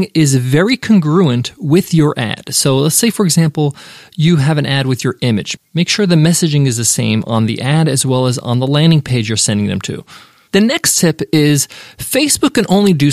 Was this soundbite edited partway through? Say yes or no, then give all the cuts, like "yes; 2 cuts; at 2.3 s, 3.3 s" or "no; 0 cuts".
yes; 2 cuts; at 5.6 s, 10.5 s